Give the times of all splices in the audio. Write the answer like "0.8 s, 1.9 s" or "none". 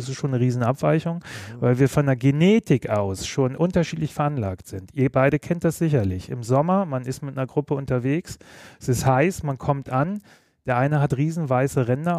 none